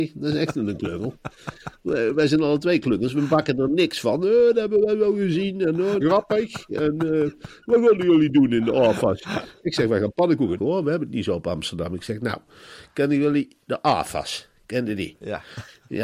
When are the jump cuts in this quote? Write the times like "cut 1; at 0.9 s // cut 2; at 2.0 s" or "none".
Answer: cut 1; at 6.0 s // cut 2; at 10.6 s